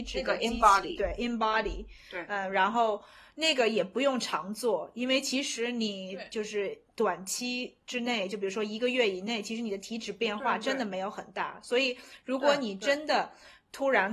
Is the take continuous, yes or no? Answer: yes